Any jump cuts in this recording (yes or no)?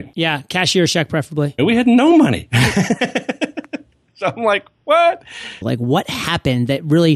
yes